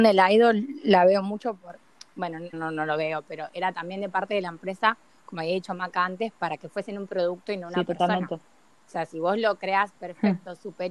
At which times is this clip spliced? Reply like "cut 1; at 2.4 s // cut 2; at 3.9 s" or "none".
cut 1; at 2.5 s